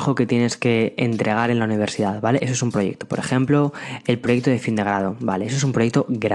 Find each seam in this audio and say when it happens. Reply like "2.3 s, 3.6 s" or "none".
2.4 s